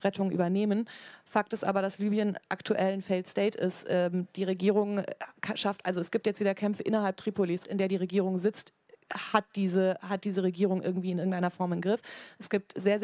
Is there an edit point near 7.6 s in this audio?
yes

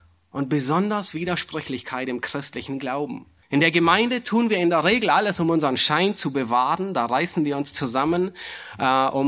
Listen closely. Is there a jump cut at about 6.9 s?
no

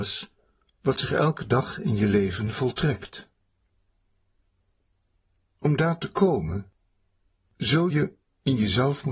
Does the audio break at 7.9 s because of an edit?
yes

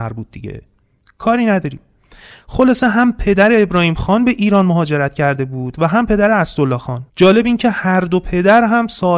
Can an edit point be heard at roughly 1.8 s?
no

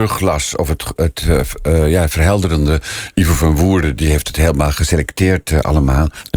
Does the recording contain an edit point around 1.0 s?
yes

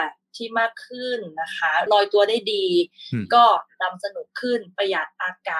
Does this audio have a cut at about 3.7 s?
no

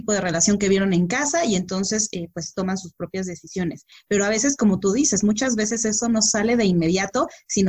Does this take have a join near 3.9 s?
no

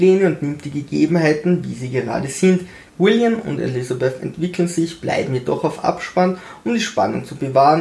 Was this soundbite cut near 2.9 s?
yes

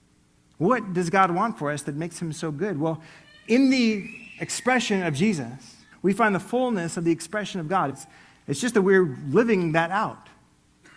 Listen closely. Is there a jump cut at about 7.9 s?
yes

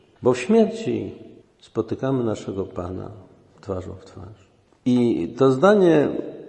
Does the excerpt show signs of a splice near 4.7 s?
yes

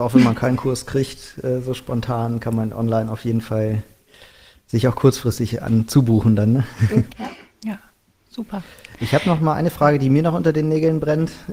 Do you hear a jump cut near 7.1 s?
yes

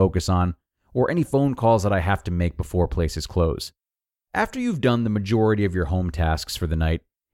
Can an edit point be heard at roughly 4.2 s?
yes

